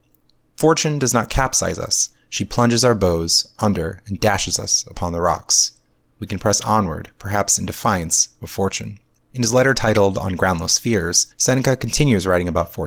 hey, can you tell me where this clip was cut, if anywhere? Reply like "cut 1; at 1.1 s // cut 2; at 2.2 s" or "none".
cut 1; at 6.1 s